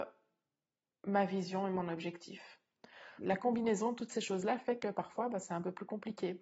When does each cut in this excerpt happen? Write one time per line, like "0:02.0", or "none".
0:03.2